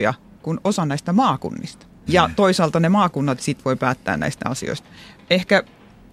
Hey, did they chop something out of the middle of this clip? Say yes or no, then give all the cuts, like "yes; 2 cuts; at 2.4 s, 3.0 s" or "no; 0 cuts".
yes; 2 cuts; at 2.1 s, 3.4 s